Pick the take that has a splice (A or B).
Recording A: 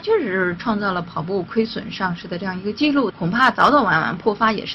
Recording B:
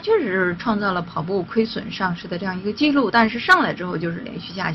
A